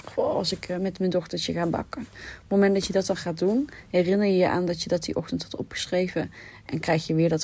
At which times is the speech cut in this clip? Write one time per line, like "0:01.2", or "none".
0:02.1

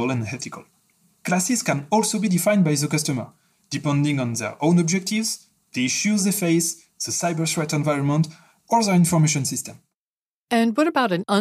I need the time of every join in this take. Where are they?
none

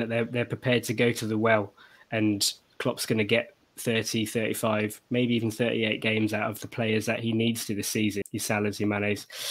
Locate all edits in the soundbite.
0:08.2

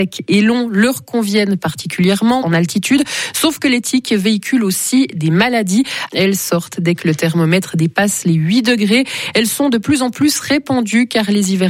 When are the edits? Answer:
0:02.4
0:06.1

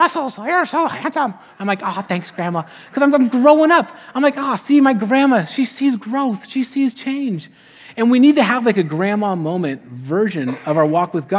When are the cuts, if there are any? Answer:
none

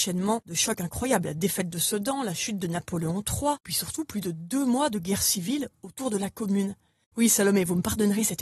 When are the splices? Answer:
0:07.0

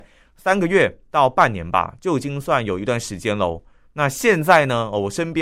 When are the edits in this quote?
none

